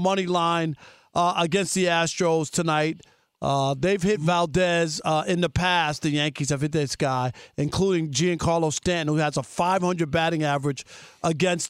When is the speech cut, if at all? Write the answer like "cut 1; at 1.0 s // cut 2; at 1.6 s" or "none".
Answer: none